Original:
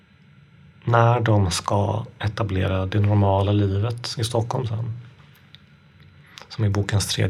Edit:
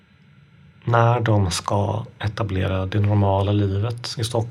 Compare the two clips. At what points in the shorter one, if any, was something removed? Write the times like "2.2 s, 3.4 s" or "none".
none